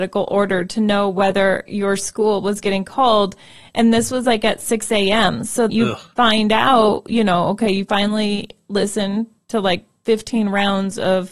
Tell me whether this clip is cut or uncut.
cut